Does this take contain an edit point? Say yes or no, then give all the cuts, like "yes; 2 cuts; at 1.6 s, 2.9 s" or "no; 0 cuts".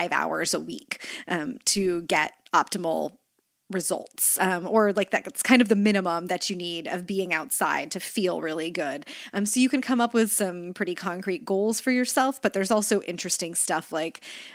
no; 0 cuts